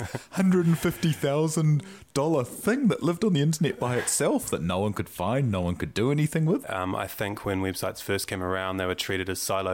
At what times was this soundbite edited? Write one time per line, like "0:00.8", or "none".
0:06.6